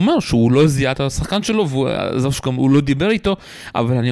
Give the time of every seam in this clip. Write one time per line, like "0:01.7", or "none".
0:00.9

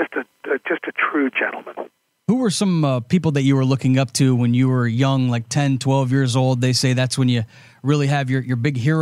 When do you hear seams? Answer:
none

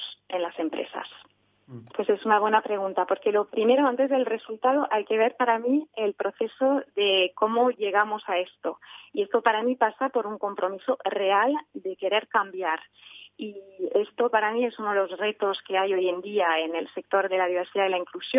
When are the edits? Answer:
0:01.9

